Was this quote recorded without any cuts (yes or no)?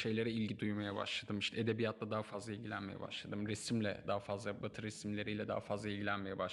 no